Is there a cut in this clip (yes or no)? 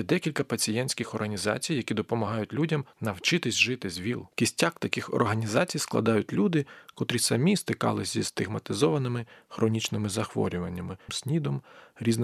yes